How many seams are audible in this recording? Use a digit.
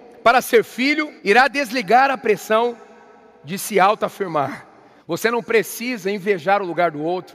2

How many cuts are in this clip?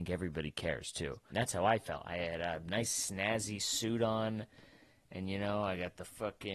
1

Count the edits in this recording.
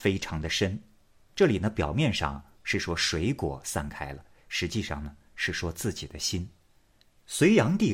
1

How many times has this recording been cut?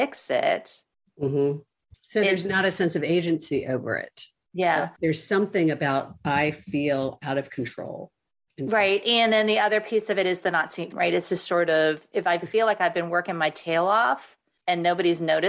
2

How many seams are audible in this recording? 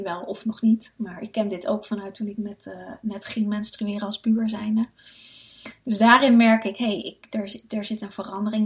0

